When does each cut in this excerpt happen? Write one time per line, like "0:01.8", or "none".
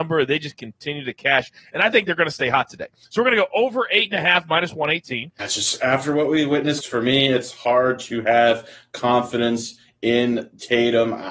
0:05.4
0:06.8